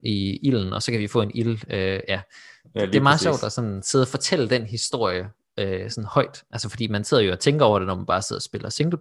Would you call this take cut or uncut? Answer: uncut